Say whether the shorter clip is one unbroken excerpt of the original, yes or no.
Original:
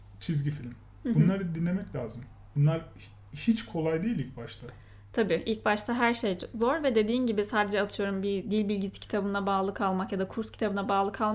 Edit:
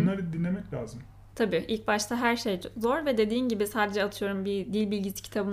no